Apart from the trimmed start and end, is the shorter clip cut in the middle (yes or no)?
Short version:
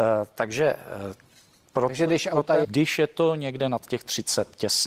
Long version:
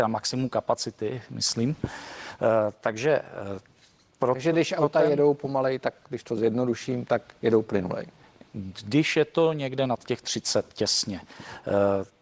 yes